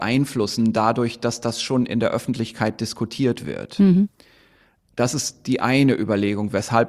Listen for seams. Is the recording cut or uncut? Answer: uncut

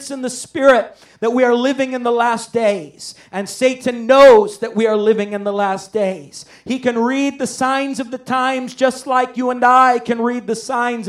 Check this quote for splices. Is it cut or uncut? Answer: uncut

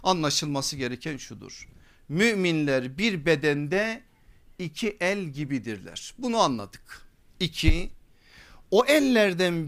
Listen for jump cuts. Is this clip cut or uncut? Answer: uncut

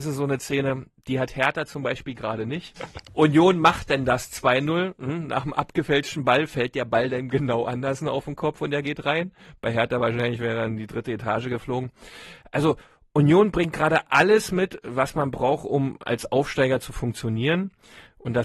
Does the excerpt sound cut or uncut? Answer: cut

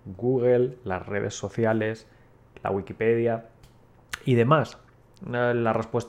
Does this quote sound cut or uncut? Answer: cut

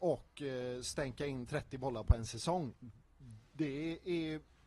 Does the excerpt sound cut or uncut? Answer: uncut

